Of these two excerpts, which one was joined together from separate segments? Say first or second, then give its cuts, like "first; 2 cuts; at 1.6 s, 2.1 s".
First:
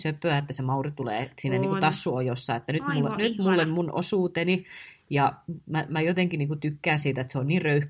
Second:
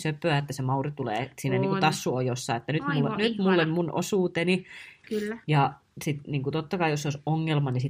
second; 1 cut; at 5.0 s